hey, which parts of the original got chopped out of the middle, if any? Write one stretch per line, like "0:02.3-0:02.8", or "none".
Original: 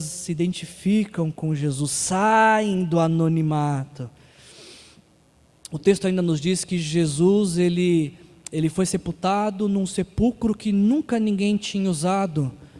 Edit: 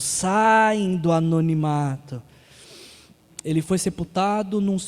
0:05.2-0:08.4